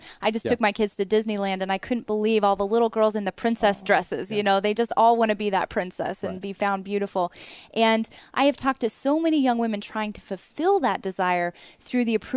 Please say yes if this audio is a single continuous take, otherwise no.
yes